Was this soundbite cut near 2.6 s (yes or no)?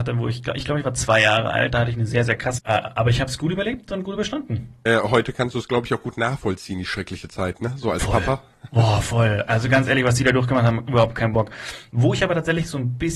yes